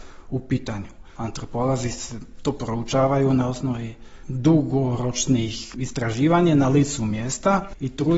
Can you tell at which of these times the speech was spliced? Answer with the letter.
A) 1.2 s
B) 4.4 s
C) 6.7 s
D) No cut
A